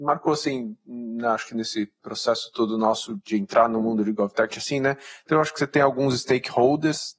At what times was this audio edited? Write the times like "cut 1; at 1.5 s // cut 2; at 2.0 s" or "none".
cut 1; at 4.5 s